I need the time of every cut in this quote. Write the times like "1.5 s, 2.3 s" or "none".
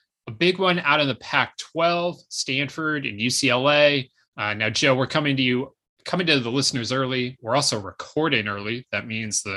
4.2 s